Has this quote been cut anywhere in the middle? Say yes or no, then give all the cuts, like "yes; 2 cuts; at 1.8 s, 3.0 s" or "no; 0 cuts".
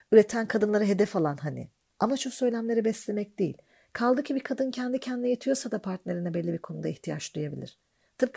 no; 0 cuts